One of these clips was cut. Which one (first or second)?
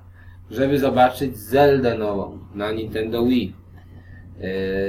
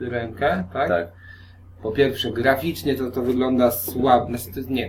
second